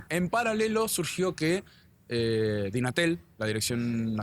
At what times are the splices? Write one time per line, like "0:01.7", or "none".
none

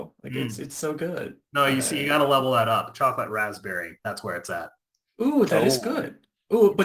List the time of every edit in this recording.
none

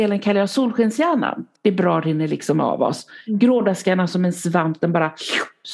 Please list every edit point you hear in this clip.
0:01.6

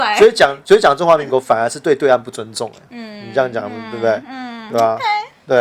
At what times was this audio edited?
none

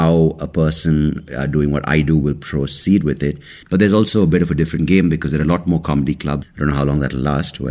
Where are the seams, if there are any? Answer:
0:03.6
0:06.4

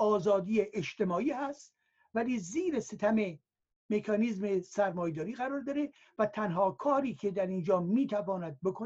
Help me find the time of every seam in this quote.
none

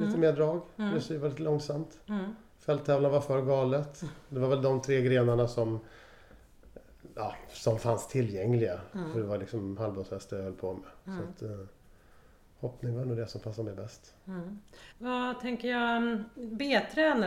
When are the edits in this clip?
0:14.9

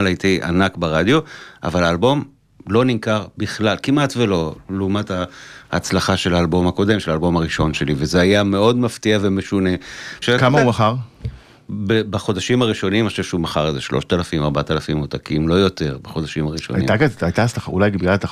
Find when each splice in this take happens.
0:10.2

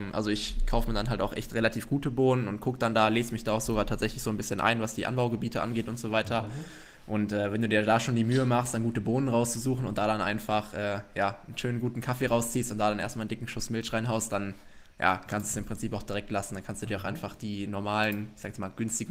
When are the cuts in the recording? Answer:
none

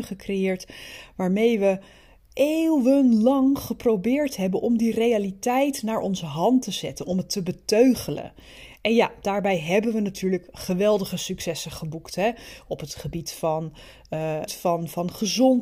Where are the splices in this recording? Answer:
0:14.5

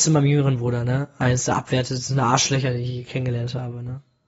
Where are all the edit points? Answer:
none

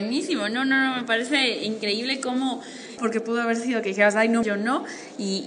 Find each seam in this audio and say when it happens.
0:03.0
0:04.4

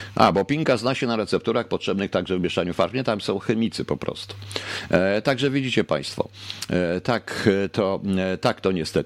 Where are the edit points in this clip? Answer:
none

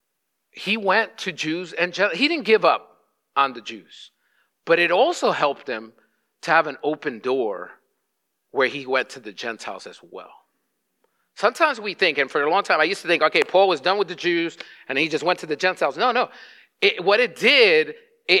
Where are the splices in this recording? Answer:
none

